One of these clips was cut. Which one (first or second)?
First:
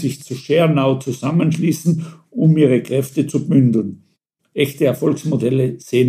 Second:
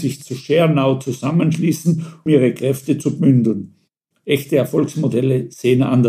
second